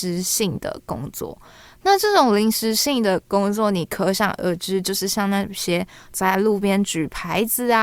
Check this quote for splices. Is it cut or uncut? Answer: uncut